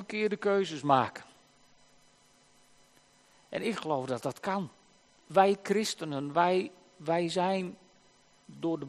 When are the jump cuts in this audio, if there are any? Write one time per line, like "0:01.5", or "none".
0:05.2